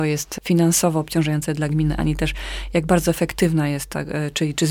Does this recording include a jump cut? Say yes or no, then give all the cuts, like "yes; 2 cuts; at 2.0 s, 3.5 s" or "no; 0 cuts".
no; 0 cuts